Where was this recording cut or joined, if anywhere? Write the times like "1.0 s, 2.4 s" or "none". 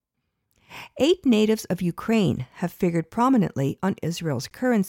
none